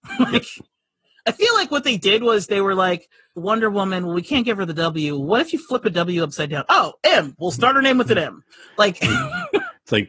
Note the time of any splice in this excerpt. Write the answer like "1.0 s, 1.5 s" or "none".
3.4 s